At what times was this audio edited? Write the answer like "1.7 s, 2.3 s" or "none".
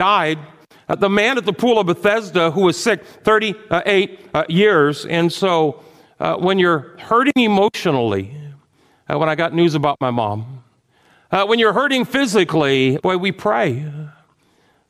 13.0 s